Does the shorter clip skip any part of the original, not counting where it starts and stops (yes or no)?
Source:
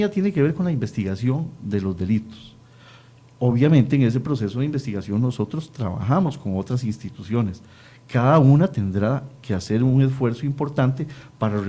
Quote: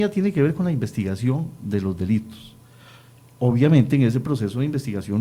no